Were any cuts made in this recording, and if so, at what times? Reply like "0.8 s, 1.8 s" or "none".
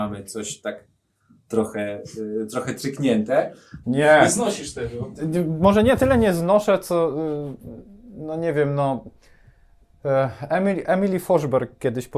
3.8 s

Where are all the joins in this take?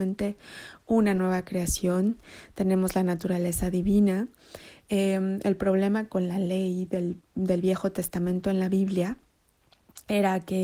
none

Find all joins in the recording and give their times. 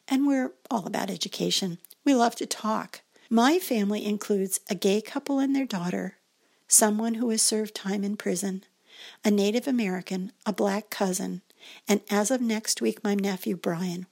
3.3 s

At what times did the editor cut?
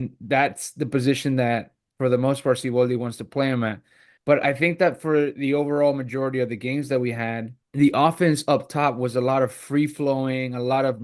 4.2 s, 7.6 s

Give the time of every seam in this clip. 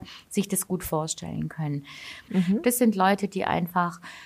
2.3 s

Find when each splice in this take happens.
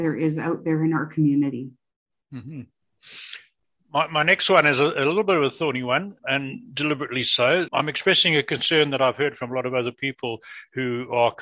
6.2 s, 7.7 s

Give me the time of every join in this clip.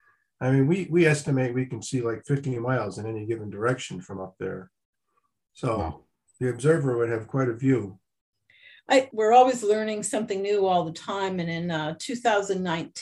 9.1 s

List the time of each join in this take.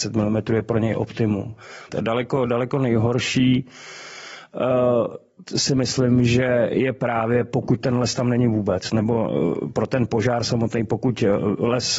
1.9 s

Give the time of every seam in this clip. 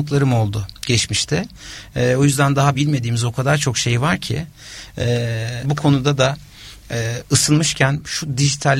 2.7 s, 5.6 s

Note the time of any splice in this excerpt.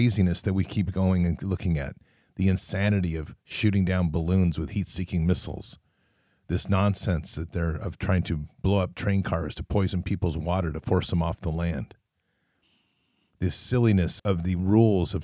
14.2 s

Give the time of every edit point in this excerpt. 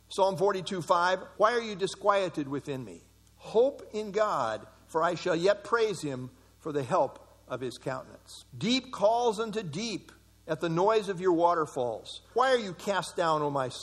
1.3 s, 8.5 s, 12.3 s

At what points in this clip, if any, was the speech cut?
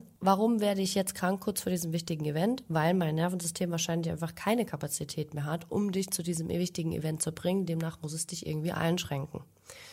none

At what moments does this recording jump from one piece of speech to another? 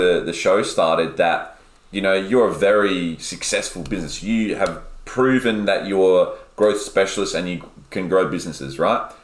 none

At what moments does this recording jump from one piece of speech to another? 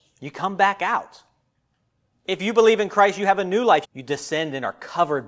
2.1 s, 3.8 s

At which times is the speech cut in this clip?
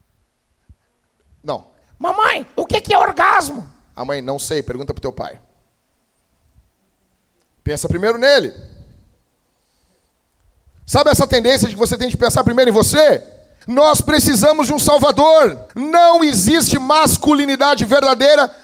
13.6 s, 15.7 s

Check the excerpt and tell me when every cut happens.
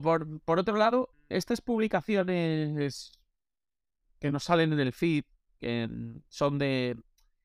1.1 s

